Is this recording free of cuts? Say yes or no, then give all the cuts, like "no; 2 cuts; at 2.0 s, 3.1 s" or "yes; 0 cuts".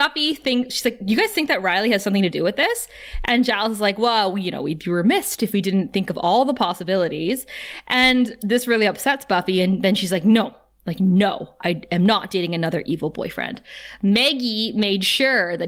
yes; 0 cuts